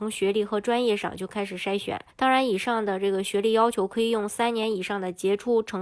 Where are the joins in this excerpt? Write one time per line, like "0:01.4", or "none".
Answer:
0:02.1